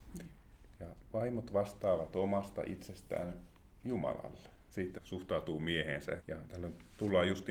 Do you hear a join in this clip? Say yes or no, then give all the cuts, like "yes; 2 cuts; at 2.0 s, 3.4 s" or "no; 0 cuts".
yes; 2 cuts; at 5.0 s, 6.2 s